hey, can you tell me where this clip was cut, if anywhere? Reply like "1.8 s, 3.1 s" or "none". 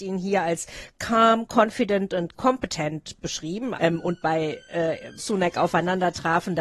3.7 s, 5.2 s